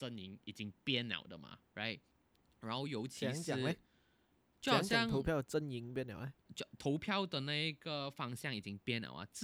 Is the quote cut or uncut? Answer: cut